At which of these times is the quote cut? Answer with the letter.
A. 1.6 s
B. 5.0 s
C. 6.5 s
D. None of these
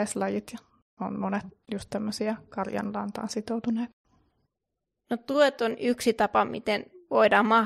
D